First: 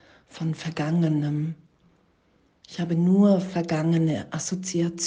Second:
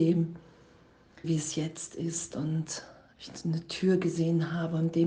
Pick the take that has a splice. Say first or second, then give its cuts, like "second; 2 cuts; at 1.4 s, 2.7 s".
second; 1 cut; at 1.2 s